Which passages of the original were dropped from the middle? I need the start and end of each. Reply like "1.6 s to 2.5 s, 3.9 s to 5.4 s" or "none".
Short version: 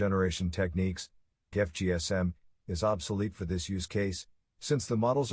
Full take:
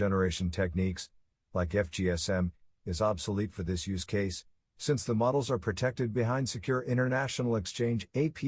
1.5 s to 1.7 s